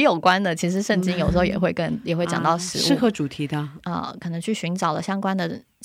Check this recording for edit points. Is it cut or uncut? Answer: cut